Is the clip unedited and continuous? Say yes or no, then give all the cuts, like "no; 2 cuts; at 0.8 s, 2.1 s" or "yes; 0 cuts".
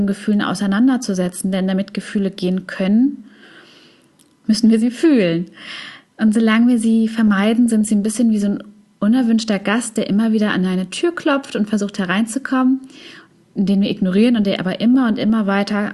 no; 1 cut; at 7.7 s